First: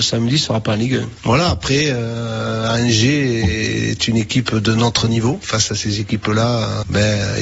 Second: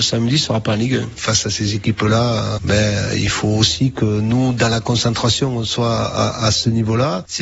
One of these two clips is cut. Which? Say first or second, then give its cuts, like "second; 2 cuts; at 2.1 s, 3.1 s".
second; 1 cut; at 1.2 s